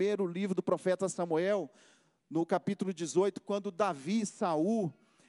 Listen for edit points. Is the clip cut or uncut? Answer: uncut